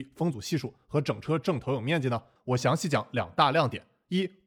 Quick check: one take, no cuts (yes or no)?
no